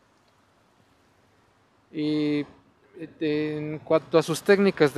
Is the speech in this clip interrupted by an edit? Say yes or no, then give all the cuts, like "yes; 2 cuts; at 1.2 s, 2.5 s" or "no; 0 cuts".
no; 0 cuts